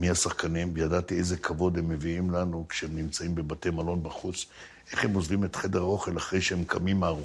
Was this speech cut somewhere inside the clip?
yes; 1 cut; at 4.7 s

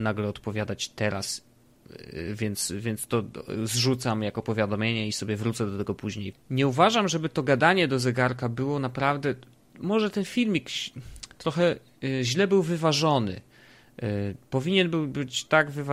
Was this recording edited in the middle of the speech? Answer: yes; 1 cut; at 6.3 s

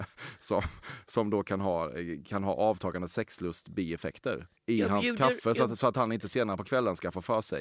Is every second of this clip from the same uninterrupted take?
no; 1 cut; at 4.6 s

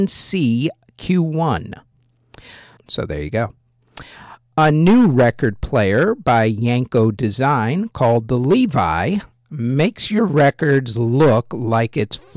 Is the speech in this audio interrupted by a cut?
yes; 1 cut; at 2.8 s

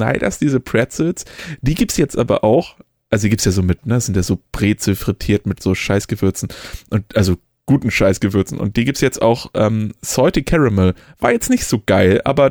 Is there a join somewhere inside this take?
no; 0 cuts

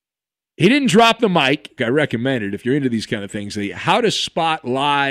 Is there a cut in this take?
yes; 1 cut; at 1.8 s

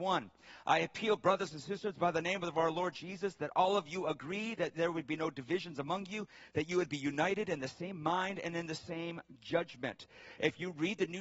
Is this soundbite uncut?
yes; 0 cuts

